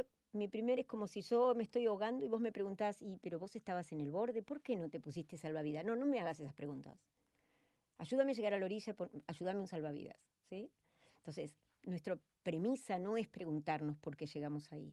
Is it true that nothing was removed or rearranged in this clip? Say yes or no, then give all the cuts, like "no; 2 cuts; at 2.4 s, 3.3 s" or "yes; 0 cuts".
yes; 0 cuts